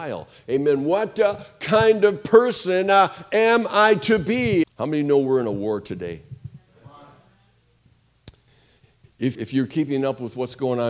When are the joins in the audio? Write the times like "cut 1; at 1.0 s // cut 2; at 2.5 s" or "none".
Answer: cut 1; at 4.6 s // cut 2; at 9.3 s

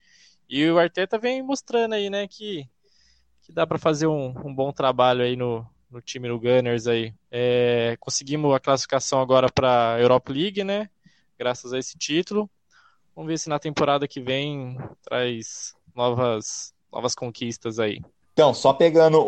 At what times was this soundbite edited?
cut 1; at 7.2 s

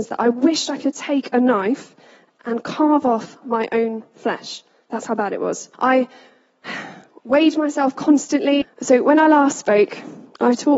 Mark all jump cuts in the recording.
cut 1; at 5.7 s // cut 2; at 8.6 s

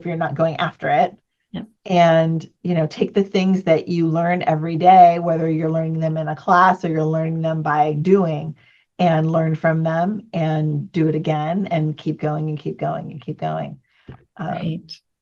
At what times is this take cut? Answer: none

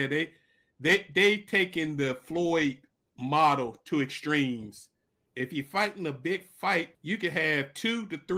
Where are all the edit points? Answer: cut 1; at 5.3 s // cut 2; at 6.9 s

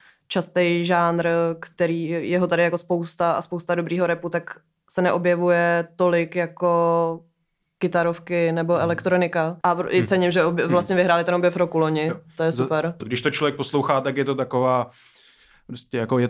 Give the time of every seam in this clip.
cut 1; at 13.0 s

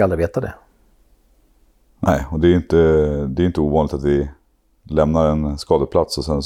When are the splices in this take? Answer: none

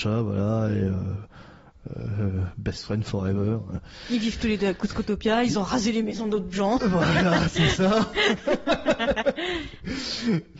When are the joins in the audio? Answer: none

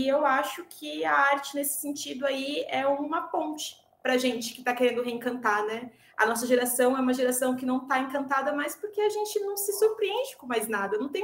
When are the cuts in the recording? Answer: none

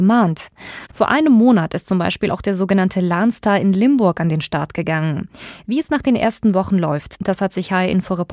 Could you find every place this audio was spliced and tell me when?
cut 1; at 0.9 s

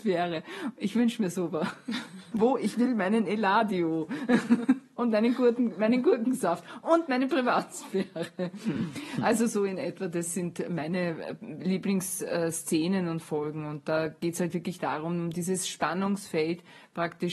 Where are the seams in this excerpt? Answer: cut 1; at 2.3 s

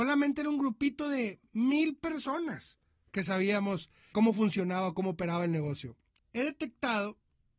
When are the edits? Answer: cut 1; at 4.1 s // cut 2; at 6.2 s

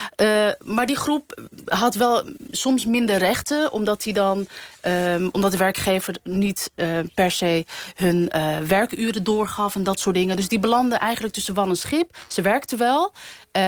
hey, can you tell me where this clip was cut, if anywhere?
none

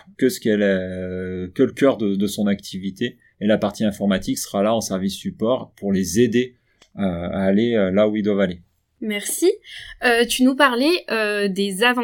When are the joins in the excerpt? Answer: none

